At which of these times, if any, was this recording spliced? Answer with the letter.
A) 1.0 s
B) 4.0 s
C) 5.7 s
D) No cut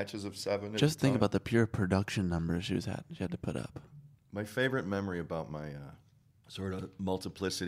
D